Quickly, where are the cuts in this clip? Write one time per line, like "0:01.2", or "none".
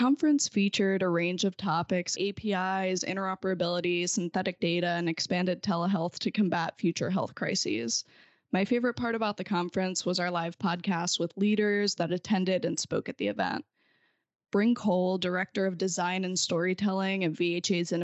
0:02.1